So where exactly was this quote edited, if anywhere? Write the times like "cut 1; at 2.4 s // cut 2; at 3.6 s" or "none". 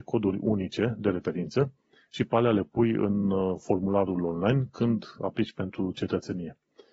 none